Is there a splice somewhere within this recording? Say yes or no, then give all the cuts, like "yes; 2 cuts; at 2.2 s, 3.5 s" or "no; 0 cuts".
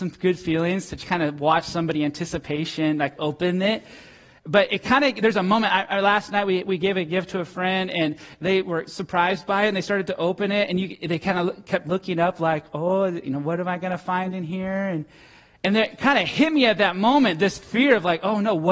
no; 0 cuts